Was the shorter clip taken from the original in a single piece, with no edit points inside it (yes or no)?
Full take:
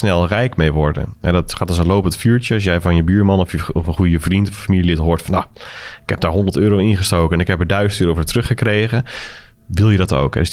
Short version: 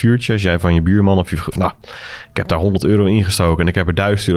no